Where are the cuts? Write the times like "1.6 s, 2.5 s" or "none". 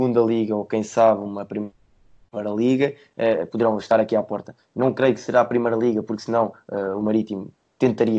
none